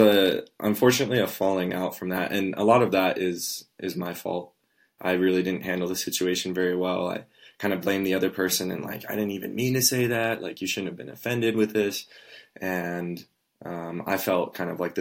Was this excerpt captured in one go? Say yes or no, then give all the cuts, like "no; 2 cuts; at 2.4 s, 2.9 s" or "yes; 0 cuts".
yes; 0 cuts